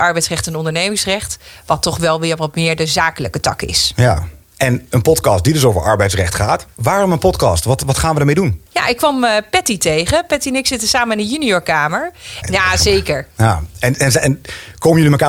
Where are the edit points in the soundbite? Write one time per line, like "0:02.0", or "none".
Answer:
0:08.7
0:12.4